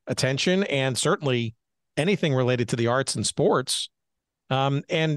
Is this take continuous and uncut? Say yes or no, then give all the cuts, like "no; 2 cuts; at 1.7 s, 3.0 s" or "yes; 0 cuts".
yes; 0 cuts